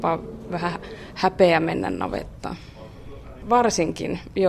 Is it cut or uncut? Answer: cut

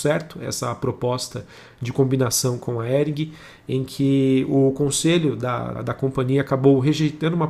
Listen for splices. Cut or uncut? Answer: cut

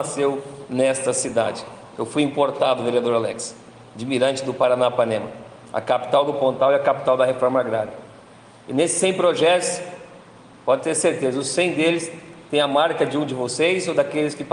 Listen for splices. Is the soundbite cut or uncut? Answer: uncut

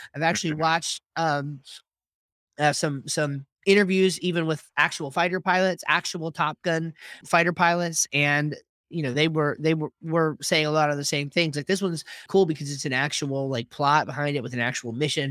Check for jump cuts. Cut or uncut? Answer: cut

